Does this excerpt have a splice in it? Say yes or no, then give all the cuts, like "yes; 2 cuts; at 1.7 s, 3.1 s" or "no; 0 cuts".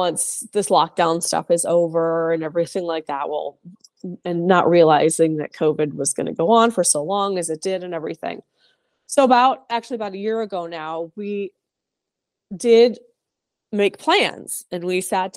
no; 0 cuts